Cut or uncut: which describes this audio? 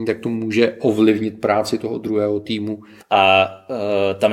cut